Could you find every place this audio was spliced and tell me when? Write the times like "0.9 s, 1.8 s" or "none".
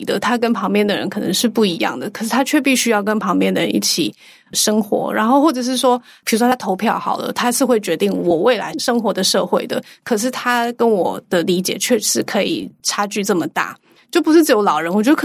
none

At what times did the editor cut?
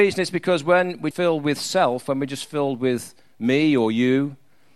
1.1 s

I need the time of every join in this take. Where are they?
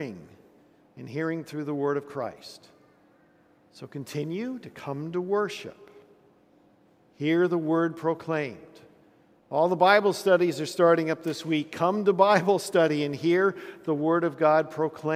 none

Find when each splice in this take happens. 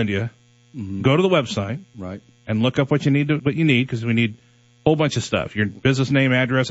3.4 s

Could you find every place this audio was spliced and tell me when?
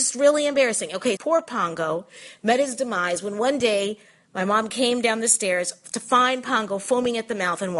1.2 s

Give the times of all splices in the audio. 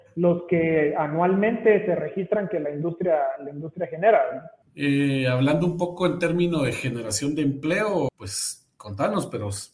4.6 s, 8.1 s

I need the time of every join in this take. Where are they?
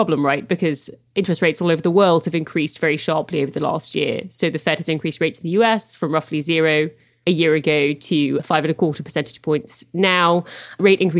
none

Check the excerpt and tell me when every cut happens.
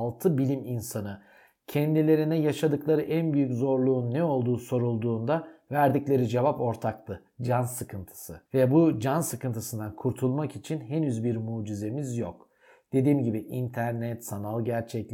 8.5 s

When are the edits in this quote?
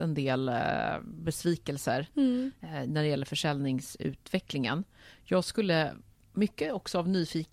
none

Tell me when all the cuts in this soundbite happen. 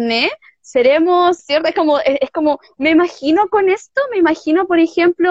1.4 s

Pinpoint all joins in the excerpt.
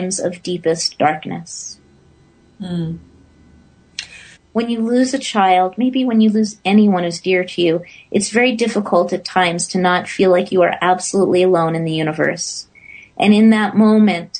4.3 s

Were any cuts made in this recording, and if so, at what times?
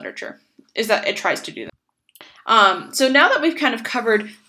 2.4 s

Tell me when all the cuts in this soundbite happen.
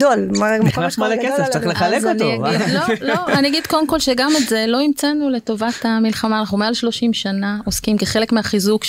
none

